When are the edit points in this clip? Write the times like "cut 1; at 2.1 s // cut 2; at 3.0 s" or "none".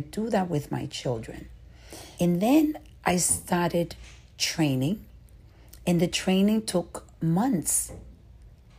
cut 1; at 2.2 s